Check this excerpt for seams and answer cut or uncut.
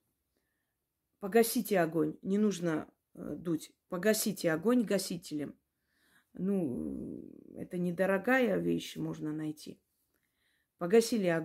uncut